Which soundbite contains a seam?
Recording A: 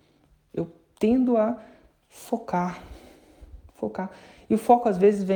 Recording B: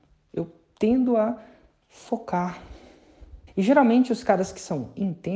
B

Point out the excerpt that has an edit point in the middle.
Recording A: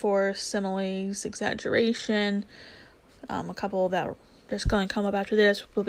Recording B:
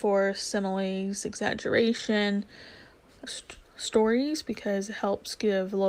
B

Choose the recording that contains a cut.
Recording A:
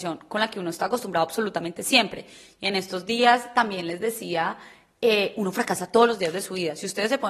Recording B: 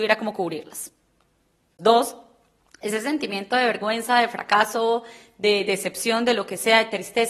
B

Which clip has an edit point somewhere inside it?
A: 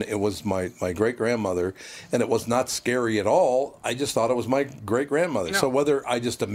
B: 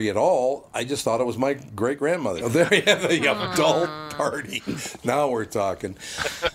B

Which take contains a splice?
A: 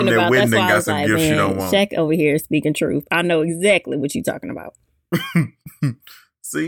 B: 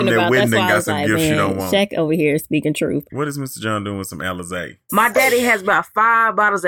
B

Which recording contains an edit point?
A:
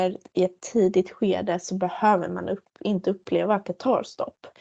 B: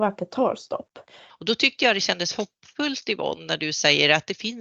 B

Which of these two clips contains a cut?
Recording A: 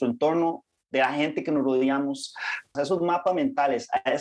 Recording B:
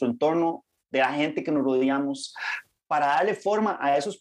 A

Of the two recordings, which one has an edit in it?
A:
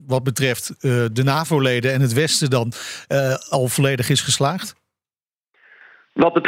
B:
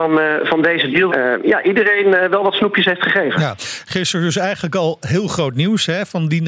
B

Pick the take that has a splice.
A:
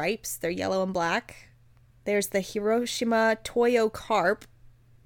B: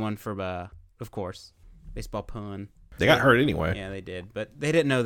B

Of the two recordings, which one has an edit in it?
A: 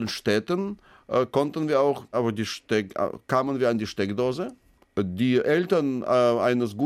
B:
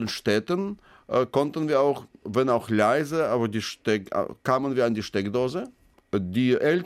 A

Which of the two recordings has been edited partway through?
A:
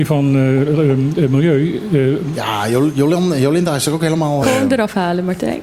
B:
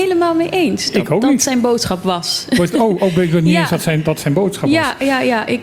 A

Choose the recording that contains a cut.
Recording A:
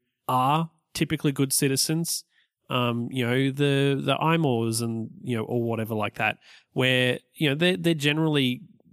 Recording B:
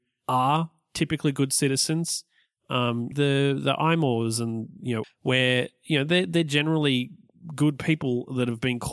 B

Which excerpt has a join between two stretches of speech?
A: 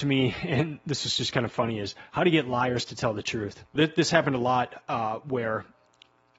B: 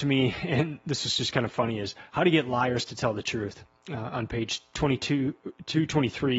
A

